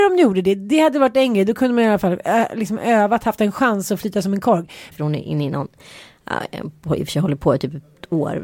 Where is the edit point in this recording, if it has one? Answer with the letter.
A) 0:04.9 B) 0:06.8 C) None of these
A